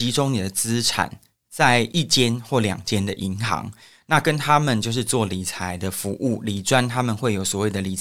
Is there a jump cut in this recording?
no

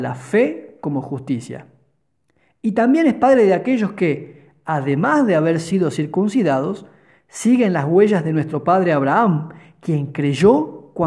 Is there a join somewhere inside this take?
no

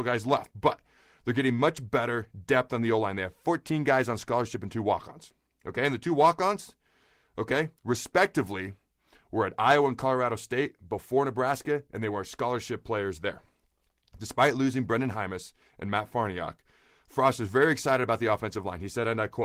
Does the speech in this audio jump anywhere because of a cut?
no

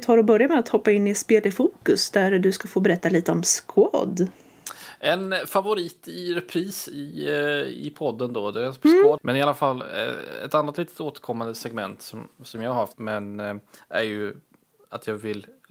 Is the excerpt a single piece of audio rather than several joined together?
no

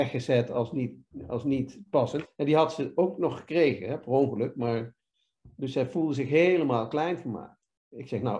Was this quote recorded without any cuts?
no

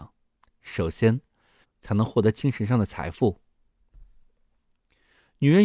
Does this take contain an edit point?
yes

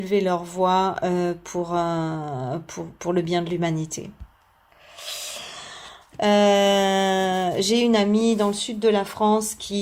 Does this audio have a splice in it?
yes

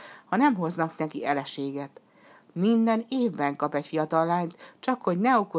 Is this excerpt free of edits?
yes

